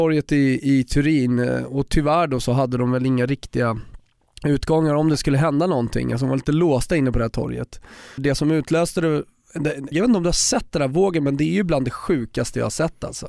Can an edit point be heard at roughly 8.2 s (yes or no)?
yes